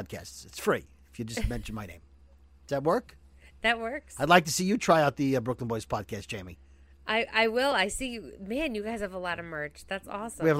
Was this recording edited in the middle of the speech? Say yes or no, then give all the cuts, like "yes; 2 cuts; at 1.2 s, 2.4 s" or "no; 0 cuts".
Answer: no; 0 cuts